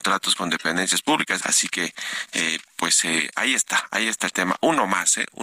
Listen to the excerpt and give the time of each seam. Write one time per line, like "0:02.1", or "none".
0:01.4